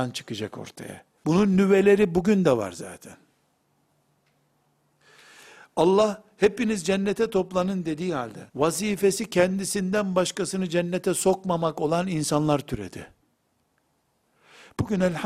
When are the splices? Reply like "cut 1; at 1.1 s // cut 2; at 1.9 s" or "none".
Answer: cut 1; at 1.2 s // cut 2; at 8.5 s